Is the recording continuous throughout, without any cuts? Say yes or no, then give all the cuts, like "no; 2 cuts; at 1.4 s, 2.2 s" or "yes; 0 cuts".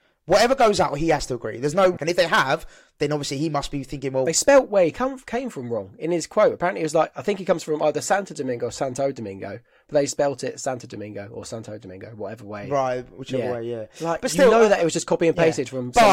no; 1 cut; at 2.0 s